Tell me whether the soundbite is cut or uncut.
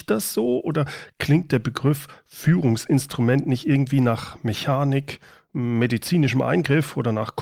uncut